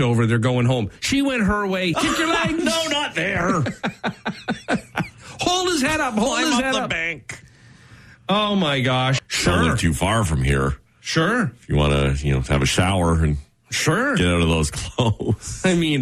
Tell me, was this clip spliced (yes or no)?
yes